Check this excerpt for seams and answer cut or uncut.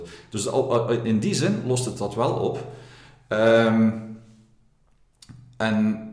uncut